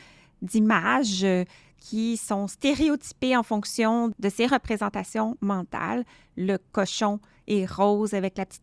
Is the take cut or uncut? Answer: uncut